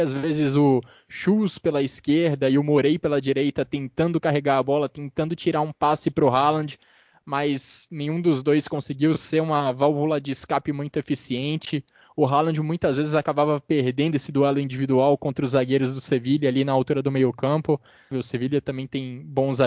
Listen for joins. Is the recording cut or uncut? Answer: cut